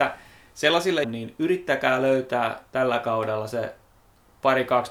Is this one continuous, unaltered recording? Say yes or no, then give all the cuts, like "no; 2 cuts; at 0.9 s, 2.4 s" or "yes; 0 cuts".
no; 1 cut; at 1.0 s